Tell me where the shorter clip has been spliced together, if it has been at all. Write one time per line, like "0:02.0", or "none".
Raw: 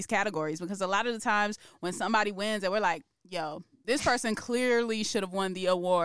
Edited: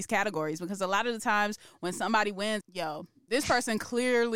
0:02.6